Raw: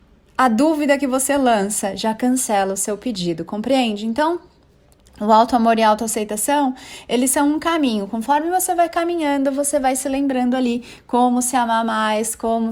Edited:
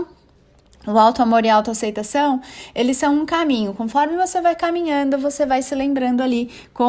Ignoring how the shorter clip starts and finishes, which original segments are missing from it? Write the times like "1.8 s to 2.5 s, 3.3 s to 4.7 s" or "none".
none